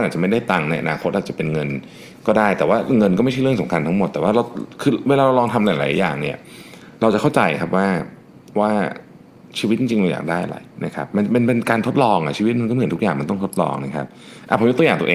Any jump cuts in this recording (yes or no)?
no